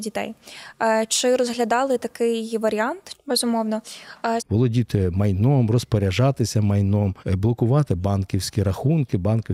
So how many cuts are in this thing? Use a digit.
3